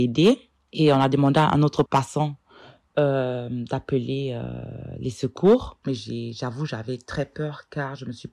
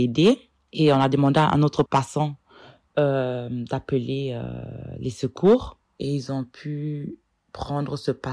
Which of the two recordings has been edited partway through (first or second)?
first